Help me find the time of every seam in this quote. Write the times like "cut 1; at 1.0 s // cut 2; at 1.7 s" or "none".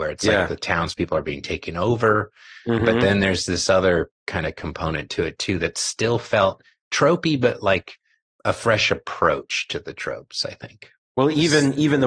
none